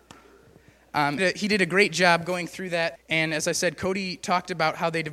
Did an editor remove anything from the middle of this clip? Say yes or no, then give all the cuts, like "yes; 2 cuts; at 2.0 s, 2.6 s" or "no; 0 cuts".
yes; 2 cuts; at 1.2 s, 3.0 s